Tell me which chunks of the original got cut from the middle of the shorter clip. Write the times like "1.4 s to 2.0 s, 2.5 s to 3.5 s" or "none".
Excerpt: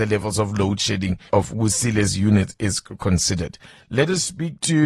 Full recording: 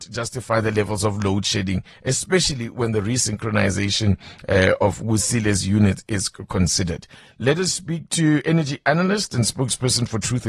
1.9 s to 4.8 s